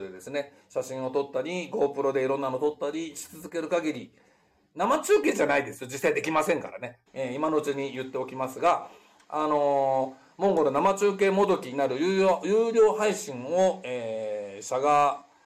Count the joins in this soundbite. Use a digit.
1